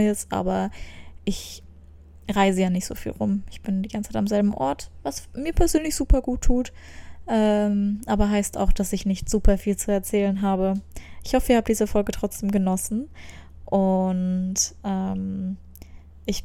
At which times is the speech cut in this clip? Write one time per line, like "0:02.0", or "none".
none

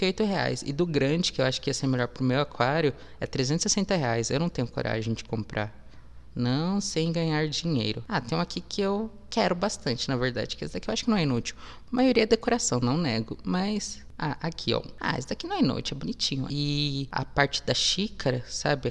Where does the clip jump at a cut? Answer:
0:11.9
0:16.5

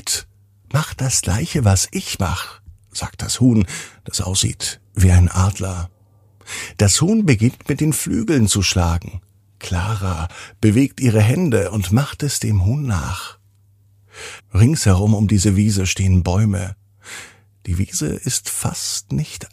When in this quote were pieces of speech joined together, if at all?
0:14.4

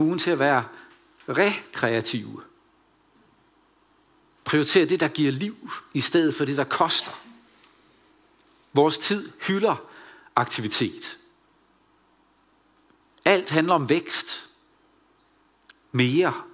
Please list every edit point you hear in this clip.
none

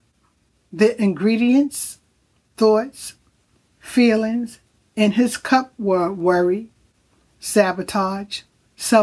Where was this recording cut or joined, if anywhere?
none

